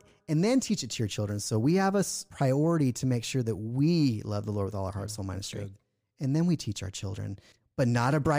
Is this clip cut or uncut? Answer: uncut